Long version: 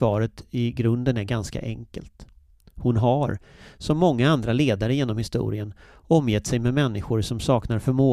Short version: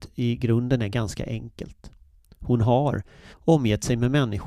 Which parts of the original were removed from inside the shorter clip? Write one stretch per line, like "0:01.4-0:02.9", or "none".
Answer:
0:03.7-0:05.9